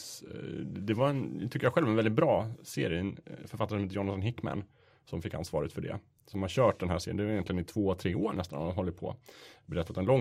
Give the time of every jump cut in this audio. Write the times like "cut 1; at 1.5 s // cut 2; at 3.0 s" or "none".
none